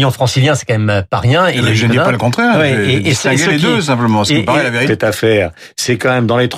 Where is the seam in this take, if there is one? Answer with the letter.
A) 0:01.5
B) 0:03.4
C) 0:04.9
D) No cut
C